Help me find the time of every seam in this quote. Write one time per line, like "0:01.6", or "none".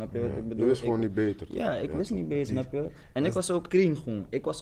0:02.5
0:03.7